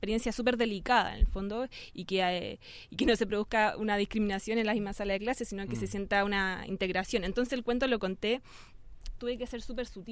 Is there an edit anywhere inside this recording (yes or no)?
yes